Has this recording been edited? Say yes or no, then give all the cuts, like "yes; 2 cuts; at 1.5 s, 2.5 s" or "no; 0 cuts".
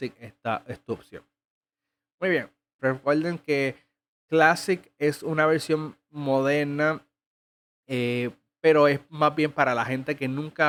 yes; 1 cut; at 2.8 s